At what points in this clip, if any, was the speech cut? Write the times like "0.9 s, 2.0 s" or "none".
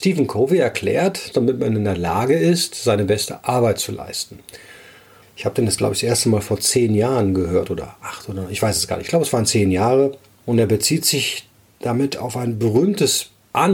1.3 s, 5.2 s, 10.4 s